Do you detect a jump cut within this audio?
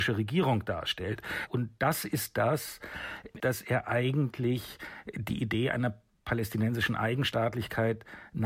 yes; 2 cuts; at 1.5 s, 3.4 s

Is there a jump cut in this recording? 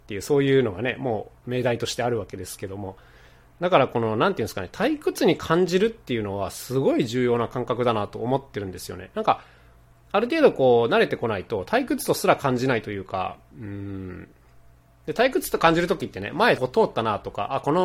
yes; 1 cut; at 16.6 s

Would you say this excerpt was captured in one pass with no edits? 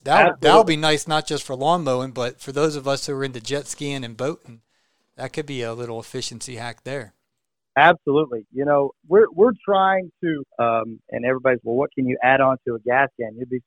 no; 2 cuts; at 10.5 s, 11.6 s

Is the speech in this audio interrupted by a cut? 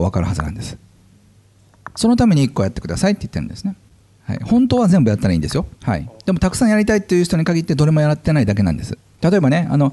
yes; 1 cut; at 5.8 s

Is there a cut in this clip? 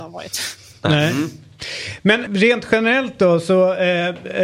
yes; 1 cut; at 2.3 s

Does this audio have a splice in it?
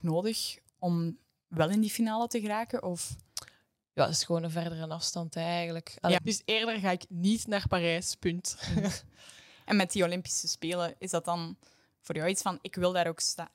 yes; 1 cut; at 6.2 s

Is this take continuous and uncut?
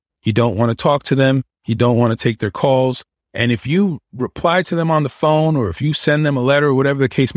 no; 1 cut; at 3.2 s

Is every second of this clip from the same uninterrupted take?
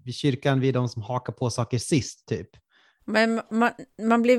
no; 1 cut; at 3.0 s

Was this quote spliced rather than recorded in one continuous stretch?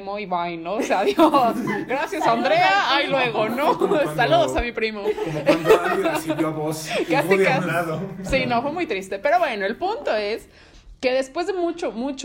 no; 0 cuts

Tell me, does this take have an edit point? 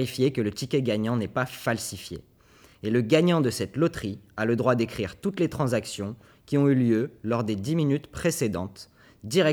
no; 0 cuts

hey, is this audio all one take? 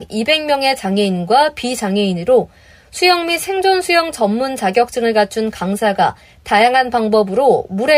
yes; 0 cuts

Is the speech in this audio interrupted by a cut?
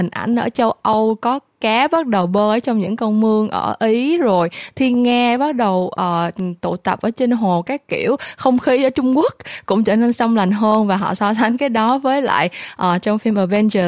no; 0 cuts

